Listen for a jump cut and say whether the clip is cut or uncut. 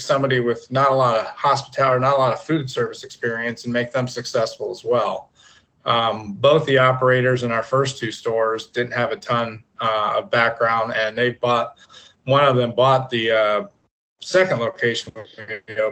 uncut